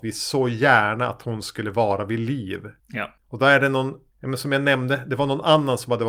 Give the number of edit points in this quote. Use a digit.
1